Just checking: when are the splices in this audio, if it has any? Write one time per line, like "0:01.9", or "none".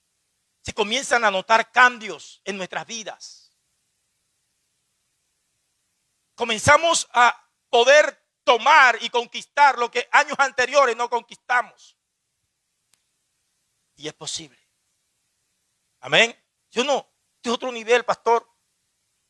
0:13.9
0:16.6